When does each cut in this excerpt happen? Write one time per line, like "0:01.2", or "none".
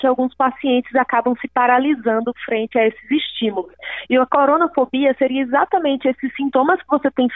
none

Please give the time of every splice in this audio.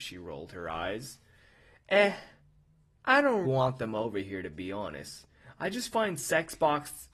0:03.4

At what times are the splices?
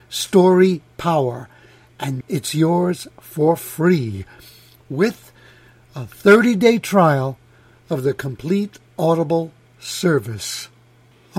0:02.2

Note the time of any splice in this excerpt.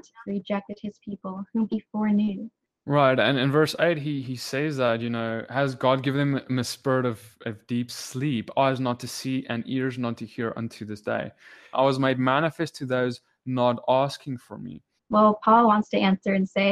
0:11.7
0:15.0

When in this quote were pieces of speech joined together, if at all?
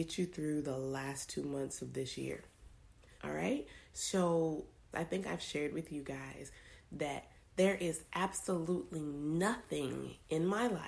0:03.2
0:04.9

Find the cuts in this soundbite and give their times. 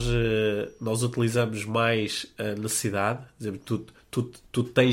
none

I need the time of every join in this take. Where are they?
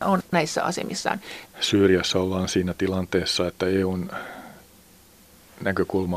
0:01.5

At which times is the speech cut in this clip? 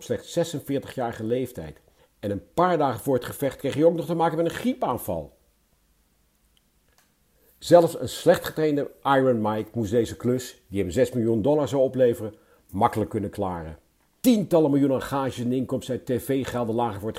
0:14.2

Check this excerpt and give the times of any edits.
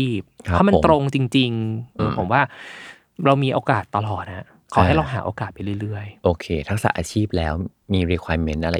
0:02.0

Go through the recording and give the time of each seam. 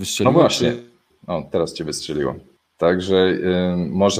0:01.1

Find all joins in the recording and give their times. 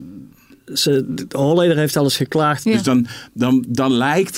0:02.6

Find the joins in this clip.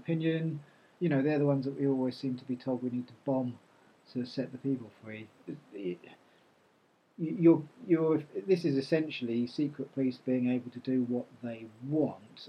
0:01.0
0:05.5

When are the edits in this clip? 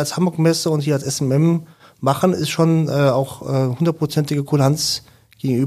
none

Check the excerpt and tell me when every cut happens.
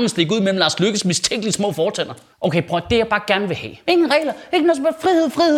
0:03.8

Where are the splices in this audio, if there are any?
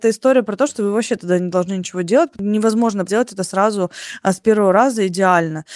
0:03.1

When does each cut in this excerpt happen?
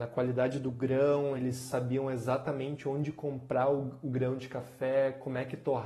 none

